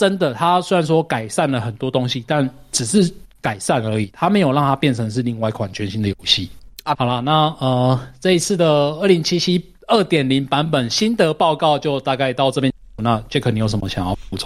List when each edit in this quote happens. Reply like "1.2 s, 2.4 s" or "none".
6.9 s